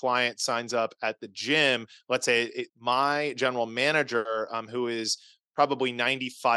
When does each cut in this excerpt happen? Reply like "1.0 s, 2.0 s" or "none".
2.7 s